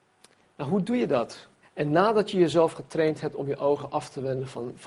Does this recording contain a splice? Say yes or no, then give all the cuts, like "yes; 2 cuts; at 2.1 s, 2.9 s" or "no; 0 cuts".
yes; 1 cut; at 1.6 s